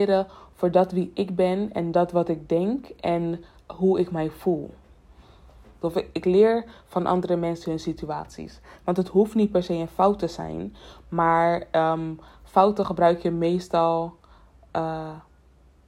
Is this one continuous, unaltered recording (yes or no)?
no